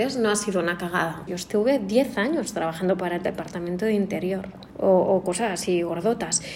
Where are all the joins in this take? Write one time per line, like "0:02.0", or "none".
0:01.3
0:04.7